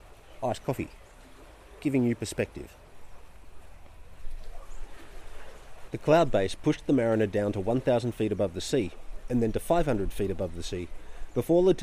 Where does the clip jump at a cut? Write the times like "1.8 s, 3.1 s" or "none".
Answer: 5.9 s